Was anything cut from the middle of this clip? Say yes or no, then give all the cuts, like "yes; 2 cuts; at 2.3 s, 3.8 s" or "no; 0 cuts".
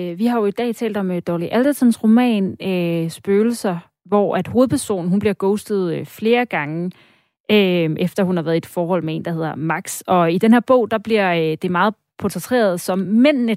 no; 0 cuts